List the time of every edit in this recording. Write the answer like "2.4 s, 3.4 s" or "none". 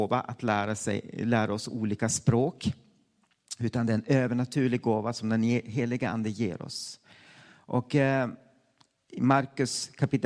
none